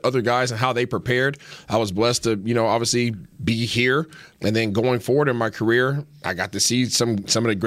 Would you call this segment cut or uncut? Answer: cut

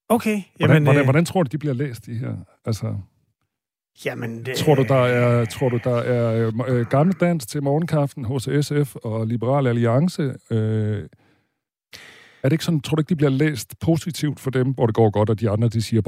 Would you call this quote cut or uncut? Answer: uncut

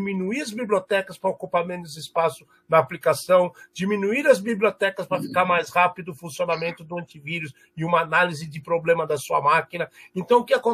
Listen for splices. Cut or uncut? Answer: uncut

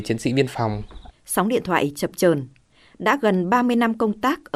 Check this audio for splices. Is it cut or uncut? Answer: cut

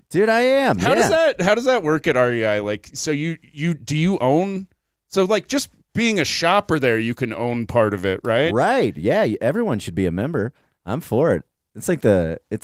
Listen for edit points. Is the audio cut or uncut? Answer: uncut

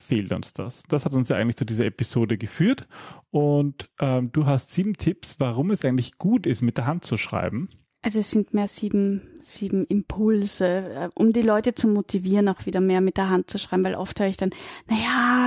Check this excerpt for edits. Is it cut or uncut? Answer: uncut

